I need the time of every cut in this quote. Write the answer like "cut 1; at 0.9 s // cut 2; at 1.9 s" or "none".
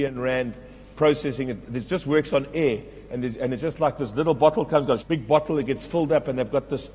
cut 1; at 5.0 s